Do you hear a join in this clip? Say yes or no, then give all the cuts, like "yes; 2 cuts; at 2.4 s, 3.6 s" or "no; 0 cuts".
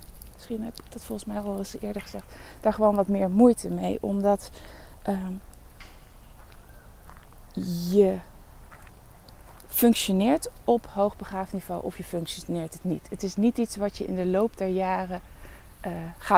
no; 0 cuts